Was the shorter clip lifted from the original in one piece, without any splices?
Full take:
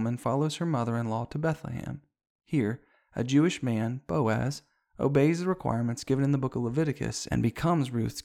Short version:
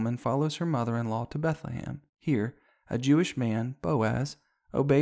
no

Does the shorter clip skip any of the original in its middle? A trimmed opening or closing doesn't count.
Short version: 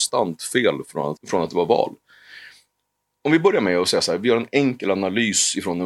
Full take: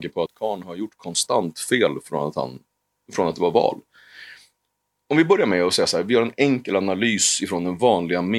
yes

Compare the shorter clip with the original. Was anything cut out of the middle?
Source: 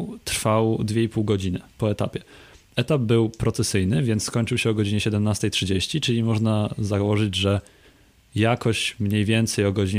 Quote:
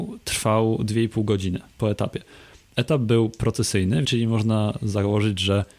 yes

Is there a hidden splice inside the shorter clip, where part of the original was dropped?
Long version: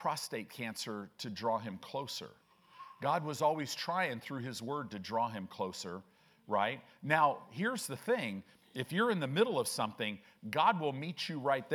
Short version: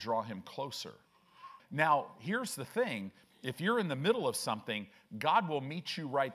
yes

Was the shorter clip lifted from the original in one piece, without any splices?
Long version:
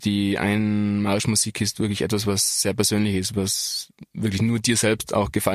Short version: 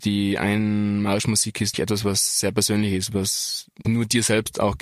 no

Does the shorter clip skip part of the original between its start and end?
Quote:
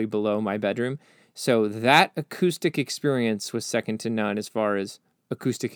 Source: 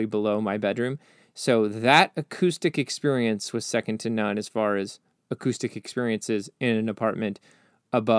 no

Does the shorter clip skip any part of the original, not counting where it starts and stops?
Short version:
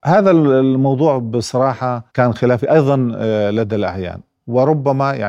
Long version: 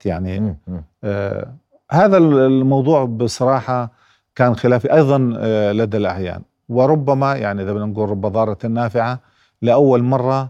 yes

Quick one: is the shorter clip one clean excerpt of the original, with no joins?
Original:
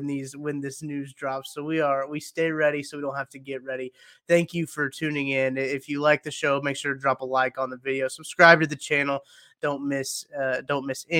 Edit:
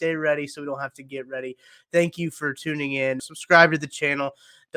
no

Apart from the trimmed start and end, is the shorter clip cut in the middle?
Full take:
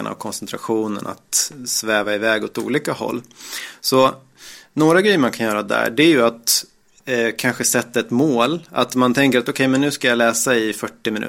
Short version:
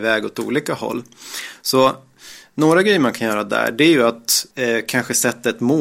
yes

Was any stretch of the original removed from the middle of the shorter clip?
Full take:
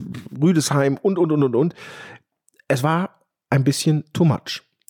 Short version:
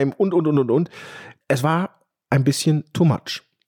yes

